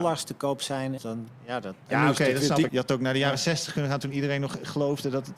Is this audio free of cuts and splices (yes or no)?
no